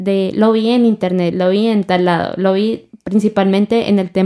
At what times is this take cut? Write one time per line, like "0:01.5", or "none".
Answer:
0:01.3

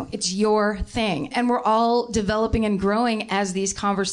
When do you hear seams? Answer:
0:01.3

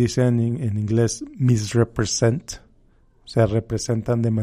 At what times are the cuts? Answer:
none

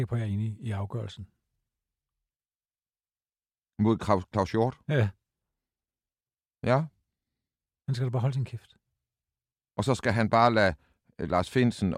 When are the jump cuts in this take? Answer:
none

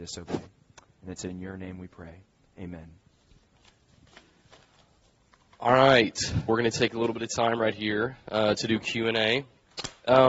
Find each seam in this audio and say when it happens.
0:06.5

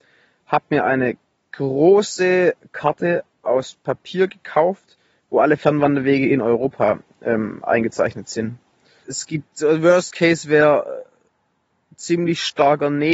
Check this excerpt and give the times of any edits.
0:09.0

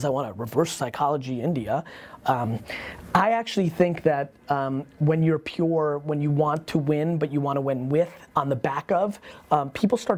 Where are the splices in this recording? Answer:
0:02.2
0:08.3

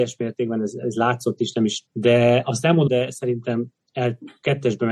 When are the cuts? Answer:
0:01.9
0:02.9

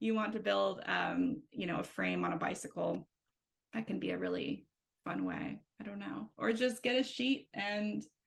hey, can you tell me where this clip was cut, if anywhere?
0:06.3

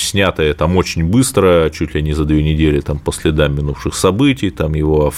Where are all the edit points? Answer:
none

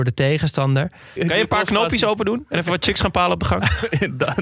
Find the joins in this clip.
0:01.2

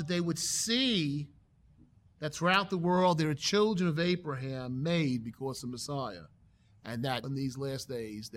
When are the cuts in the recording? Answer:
0:07.2

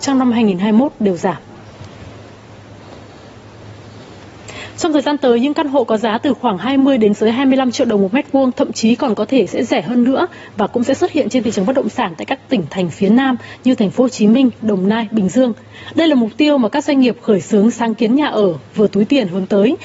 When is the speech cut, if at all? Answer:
0:14.6

